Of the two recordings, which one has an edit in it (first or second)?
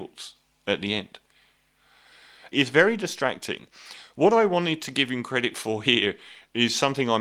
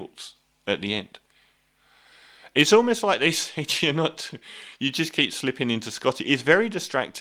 first